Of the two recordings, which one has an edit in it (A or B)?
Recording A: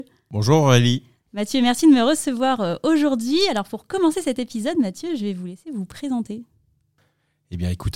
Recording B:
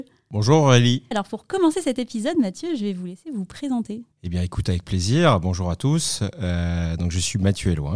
B